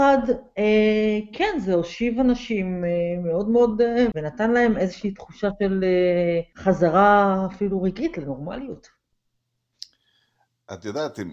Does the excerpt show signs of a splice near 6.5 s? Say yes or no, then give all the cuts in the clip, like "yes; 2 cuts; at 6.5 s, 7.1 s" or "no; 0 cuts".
yes; 2 cuts; at 4.1 s, 6.5 s